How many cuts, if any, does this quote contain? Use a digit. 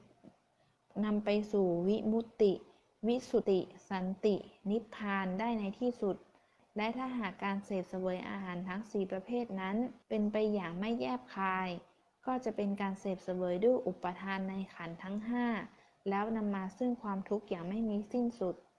2